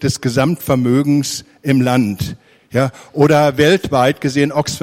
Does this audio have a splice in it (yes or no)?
no